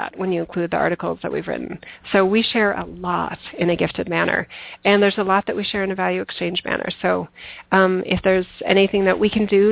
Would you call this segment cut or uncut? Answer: uncut